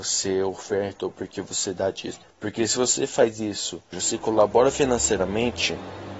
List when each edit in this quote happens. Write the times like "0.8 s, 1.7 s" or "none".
2.2 s, 3.9 s